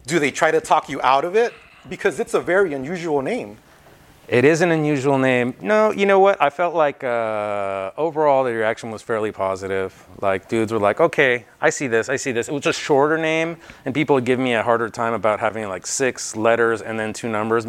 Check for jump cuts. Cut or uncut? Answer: uncut